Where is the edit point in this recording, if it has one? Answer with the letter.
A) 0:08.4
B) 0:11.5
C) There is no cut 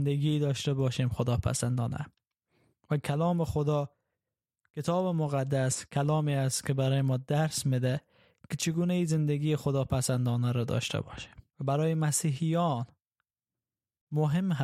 B